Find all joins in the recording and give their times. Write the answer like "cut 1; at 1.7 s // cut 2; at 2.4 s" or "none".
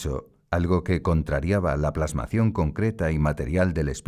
none